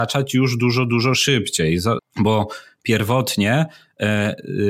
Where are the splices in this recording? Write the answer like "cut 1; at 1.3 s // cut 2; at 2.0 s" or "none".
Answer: cut 1; at 2.0 s